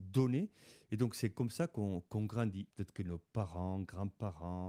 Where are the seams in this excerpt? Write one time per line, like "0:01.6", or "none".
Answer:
0:02.7